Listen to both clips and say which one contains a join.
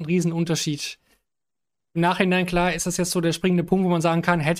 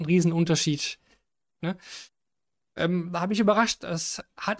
second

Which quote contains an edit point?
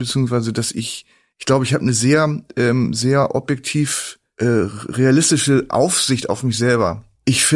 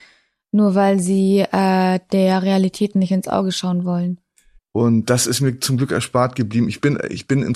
second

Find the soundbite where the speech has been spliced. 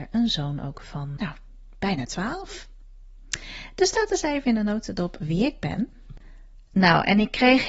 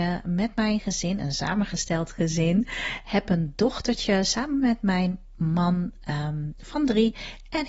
first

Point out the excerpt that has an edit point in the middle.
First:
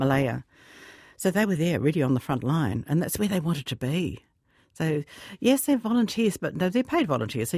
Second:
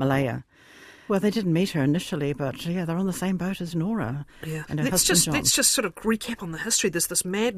second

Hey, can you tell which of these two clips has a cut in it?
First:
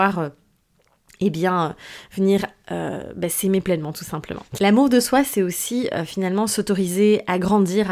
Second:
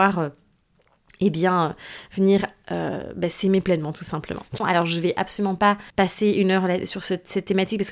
second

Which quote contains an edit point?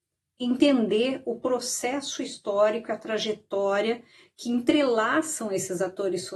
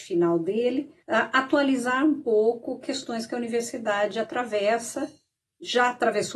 second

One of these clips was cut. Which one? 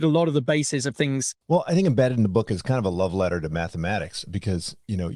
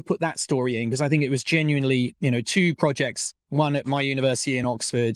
first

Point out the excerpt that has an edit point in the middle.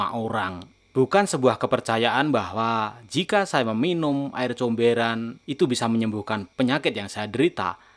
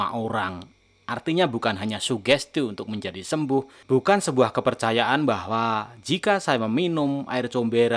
first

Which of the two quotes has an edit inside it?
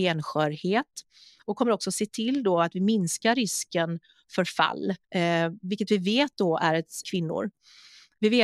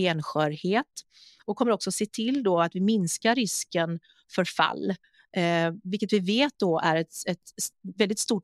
first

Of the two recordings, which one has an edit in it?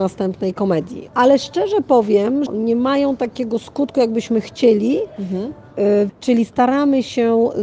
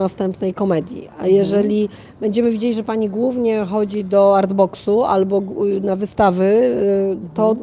first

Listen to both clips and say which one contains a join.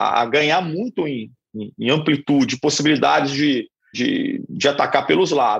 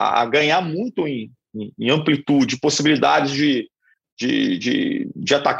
first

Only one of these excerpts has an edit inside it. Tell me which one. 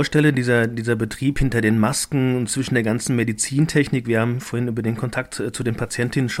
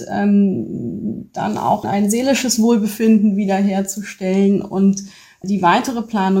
second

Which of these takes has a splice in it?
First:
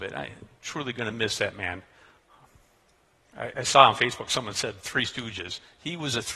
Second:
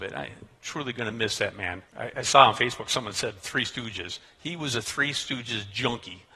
second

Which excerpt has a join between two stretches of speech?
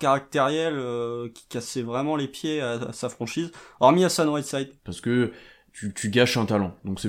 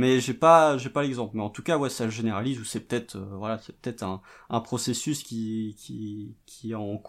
first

